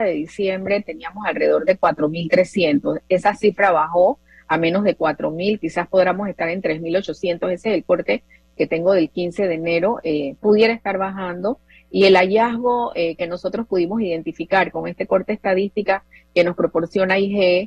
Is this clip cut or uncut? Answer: uncut